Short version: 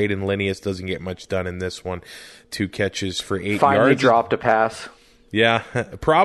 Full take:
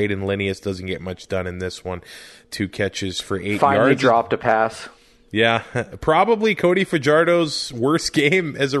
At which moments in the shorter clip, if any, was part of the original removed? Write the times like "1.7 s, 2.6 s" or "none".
none